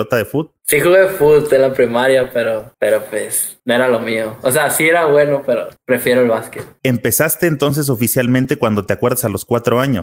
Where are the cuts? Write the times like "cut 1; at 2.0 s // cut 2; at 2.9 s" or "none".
none